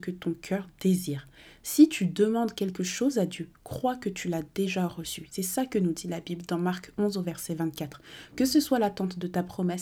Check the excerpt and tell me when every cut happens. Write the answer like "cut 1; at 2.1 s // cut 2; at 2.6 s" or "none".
none